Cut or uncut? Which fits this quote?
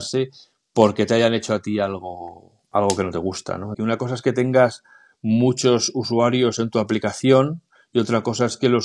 cut